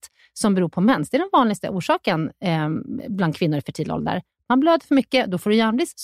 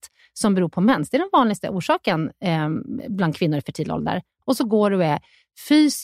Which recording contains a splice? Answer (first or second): second